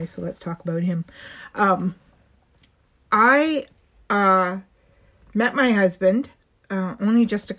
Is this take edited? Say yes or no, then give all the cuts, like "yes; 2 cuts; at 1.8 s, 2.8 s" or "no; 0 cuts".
no; 0 cuts